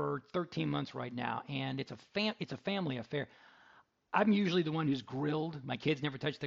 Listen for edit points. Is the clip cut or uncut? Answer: uncut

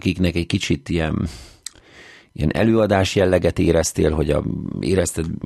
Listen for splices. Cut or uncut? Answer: uncut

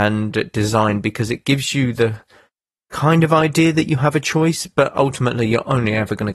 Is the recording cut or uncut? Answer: uncut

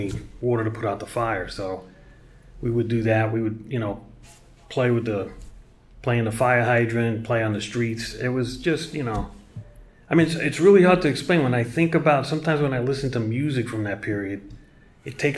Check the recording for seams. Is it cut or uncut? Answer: uncut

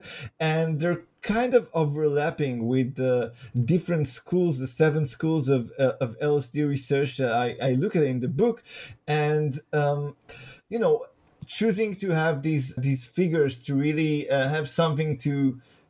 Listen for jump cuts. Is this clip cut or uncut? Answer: cut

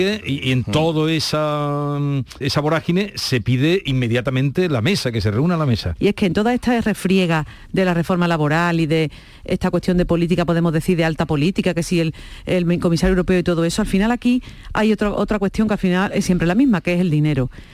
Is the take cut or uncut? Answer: cut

